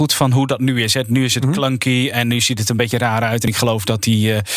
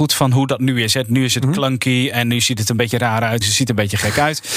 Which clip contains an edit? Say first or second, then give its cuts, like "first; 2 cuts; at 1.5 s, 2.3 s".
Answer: second; 1 cut; at 3.4 s